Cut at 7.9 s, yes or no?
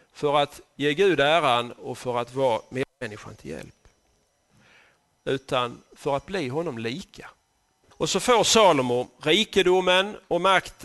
yes